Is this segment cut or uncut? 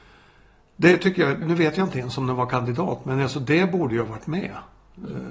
cut